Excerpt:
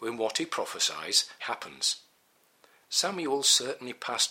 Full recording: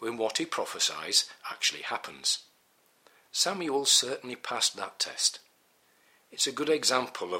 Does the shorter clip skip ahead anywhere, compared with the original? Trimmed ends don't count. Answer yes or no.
yes